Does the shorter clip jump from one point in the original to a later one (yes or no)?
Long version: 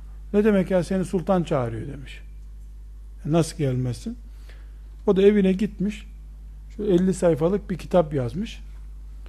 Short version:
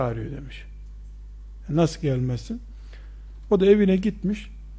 no